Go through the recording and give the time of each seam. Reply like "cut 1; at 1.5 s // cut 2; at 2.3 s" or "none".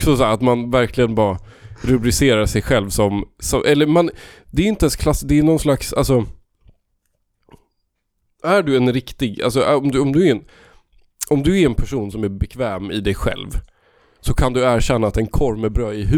none

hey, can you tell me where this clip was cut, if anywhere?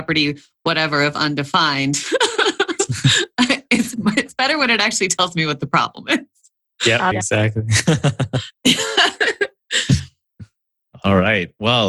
cut 1; at 7.1 s

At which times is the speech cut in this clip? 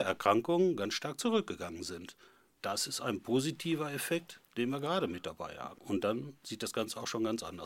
none

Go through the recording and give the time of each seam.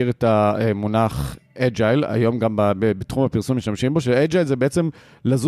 none

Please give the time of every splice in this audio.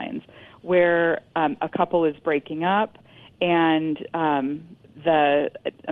none

